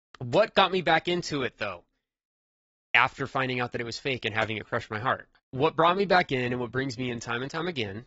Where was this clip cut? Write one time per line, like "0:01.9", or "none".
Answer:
0:05.4